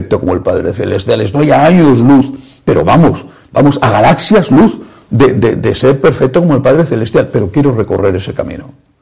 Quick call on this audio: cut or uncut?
uncut